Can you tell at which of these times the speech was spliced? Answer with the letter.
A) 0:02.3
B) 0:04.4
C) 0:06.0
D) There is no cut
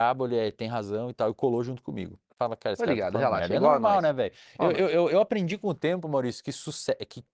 A